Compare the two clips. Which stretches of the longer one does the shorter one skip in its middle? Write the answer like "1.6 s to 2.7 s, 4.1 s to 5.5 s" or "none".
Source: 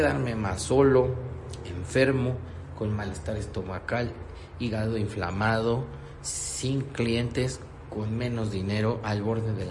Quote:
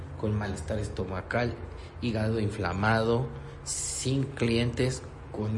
none